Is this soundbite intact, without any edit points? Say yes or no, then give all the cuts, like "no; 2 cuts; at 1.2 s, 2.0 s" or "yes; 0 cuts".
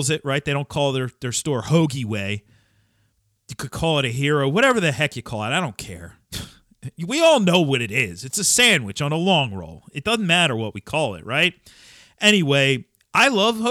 yes; 0 cuts